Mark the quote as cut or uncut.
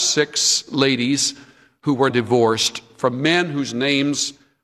cut